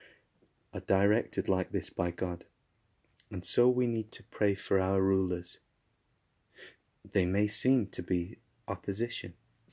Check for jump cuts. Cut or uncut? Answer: uncut